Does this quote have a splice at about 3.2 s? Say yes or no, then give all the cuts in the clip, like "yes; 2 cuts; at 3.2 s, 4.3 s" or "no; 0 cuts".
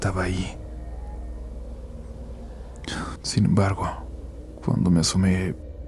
yes; 1 cut; at 3.2 s